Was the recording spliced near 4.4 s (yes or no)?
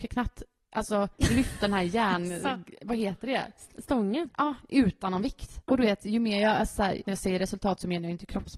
no